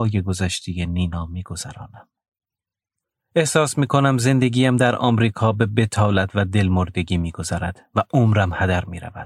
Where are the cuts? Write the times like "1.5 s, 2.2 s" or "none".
none